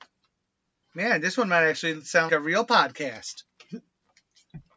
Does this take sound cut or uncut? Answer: cut